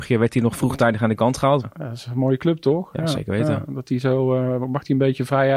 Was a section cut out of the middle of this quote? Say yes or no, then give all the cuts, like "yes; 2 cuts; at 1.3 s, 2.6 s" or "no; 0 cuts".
yes; 1 cut; at 1.6 s